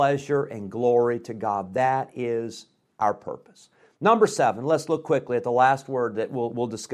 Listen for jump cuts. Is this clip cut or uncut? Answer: uncut